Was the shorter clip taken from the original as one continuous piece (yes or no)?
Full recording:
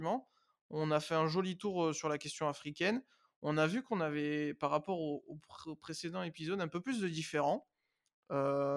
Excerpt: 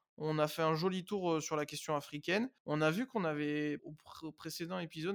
no